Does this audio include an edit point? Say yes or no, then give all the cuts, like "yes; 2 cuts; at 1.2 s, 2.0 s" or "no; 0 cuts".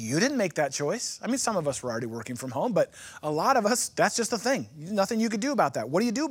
no; 0 cuts